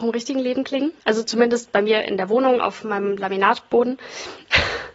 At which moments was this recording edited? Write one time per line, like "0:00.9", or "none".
0:01.0